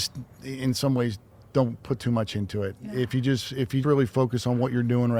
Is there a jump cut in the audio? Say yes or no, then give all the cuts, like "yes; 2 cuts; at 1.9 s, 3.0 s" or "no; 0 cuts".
yes; 1 cut; at 3.8 s